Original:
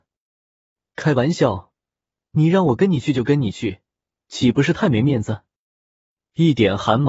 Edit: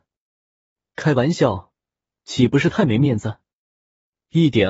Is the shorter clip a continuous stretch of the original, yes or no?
no